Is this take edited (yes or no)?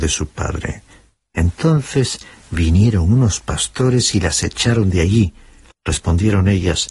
yes